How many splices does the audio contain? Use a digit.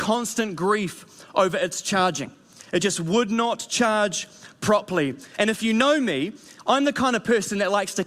0